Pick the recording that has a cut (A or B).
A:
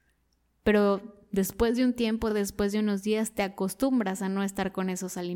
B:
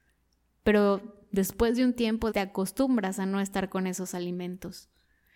B